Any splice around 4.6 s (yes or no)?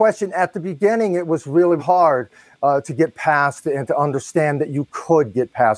no